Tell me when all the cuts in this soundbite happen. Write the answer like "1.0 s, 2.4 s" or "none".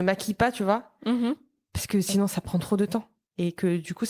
none